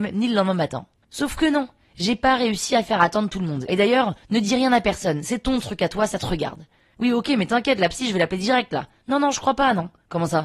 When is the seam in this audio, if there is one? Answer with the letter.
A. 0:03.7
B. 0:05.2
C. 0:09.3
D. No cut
A